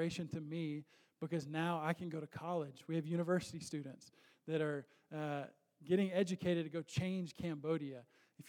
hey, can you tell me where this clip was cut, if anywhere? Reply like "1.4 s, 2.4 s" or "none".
none